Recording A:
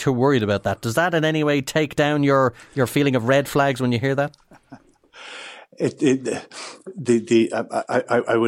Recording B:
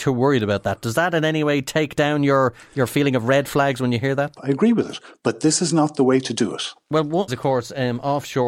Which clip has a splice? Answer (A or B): B